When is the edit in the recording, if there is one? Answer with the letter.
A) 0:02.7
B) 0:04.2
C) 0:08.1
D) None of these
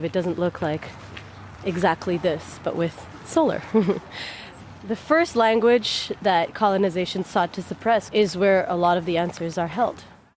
C